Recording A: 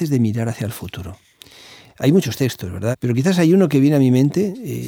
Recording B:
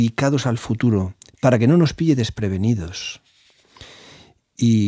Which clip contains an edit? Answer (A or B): A